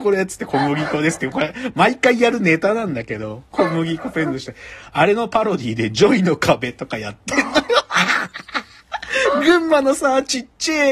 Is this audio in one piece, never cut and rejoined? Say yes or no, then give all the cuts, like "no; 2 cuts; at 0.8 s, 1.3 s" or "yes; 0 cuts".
no; 1 cut; at 4.9 s